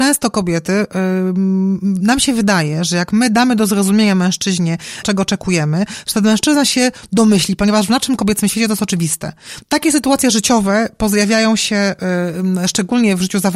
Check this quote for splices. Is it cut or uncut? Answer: cut